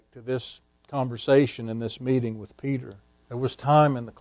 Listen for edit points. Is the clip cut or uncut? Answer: cut